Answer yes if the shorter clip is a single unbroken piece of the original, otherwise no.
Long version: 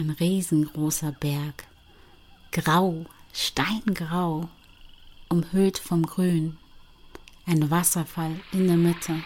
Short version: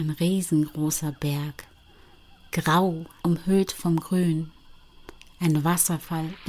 no